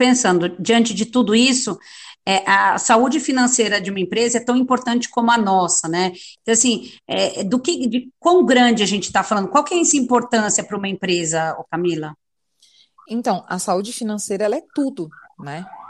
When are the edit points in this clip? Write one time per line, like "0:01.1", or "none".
none